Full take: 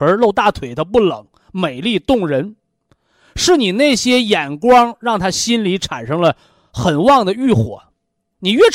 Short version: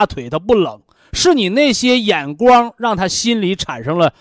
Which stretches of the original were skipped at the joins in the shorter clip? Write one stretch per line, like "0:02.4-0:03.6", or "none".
0:01.4-0:03.2